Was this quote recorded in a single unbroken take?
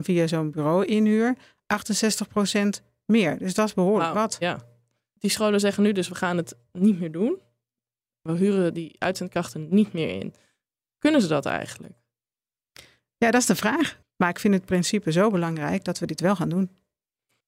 no; 1 cut; at 14.0 s

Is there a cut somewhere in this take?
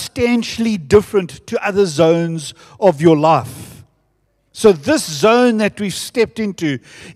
no; 0 cuts

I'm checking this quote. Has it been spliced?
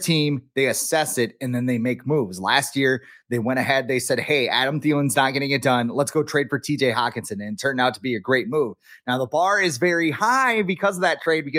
no; 0 cuts

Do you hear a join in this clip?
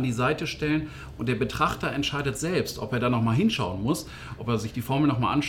no; 0 cuts

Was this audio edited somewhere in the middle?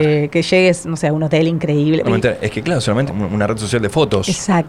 yes; 2 cuts; at 2.0 s, 3.1 s

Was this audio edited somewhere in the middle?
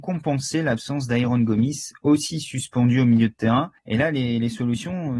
yes; 1 cut; at 3.8 s

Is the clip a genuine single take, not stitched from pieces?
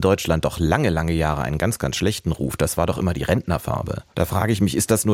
no; 1 cut; at 4.1 s

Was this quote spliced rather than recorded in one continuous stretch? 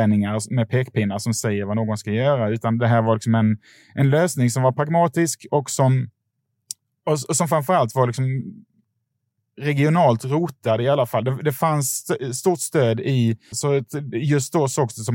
yes; 1 cut; at 13.5 s

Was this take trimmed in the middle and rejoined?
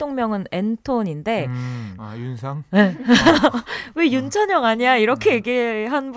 yes; 1 cut; at 2.0 s

